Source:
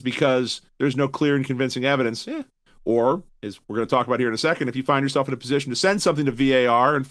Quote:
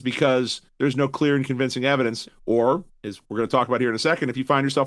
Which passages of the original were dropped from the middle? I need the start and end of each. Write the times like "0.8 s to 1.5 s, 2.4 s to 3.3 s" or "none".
2.2 s to 2.6 s

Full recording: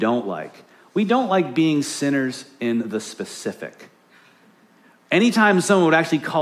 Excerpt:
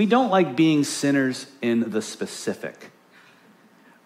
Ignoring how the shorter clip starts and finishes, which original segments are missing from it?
none

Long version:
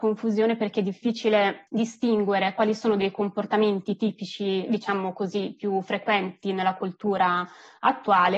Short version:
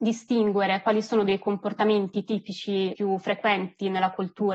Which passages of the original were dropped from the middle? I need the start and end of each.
4.7 s to 5.6 s

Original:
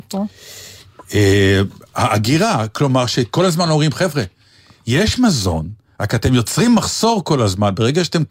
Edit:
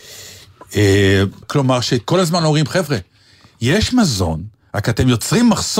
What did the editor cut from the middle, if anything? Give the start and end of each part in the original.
1.8 s to 2.7 s

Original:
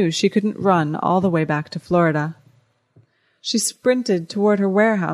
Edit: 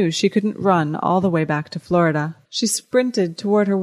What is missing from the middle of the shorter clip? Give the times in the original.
2.4 s to 3.4 s

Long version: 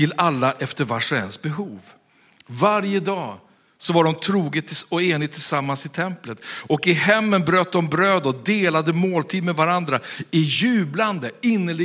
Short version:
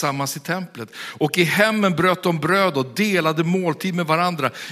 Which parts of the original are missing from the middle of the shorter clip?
none

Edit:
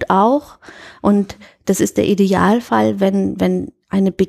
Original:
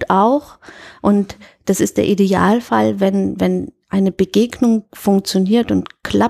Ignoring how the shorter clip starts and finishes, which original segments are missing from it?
none

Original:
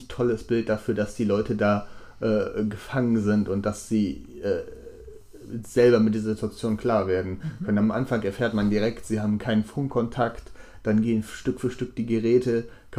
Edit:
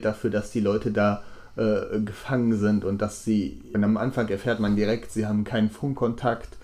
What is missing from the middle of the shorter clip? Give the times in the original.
4.4 s to 7.7 s

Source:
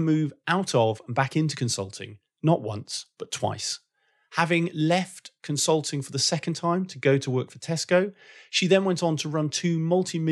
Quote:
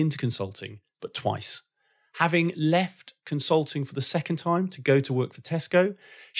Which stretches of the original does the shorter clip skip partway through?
2.3 s to 3.1 s

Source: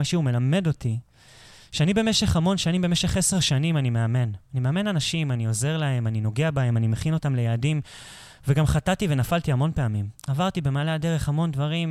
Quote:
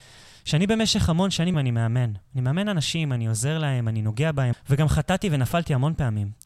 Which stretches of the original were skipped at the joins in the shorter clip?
2.8 s to 3.7 s, 6.7 s to 8.3 s

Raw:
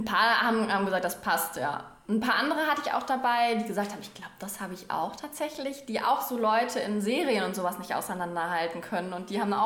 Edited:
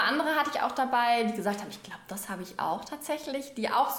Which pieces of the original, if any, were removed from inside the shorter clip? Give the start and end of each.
none

